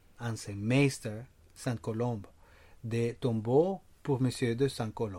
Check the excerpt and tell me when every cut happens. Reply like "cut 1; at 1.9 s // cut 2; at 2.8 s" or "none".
none